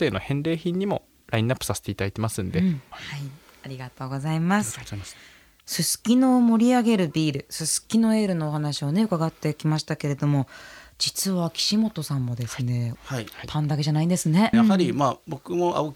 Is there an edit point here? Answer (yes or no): yes